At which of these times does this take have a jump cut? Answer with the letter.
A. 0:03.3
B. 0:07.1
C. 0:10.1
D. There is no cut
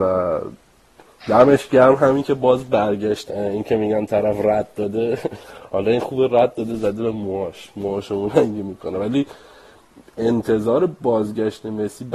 A